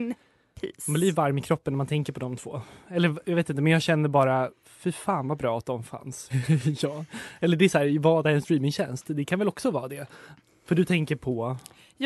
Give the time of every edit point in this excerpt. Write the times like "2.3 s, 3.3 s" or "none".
6.3 s